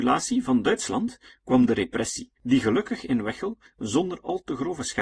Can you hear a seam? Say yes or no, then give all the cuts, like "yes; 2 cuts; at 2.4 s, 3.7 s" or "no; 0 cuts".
yes; 1 cut; at 2.4 s